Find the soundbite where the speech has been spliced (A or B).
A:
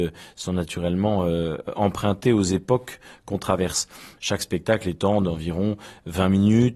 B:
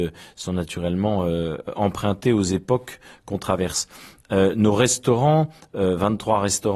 A